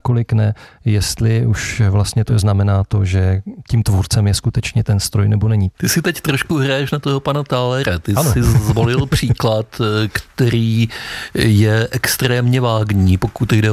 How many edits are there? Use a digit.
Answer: 2